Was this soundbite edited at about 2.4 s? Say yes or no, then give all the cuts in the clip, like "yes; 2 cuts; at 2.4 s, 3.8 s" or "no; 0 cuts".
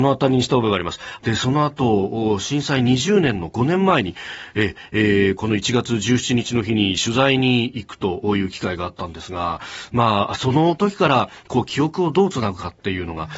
no; 1 cut; at 1.2 s